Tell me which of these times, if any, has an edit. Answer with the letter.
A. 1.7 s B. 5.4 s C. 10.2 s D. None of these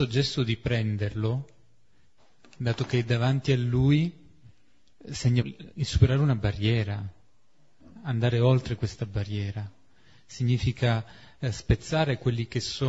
B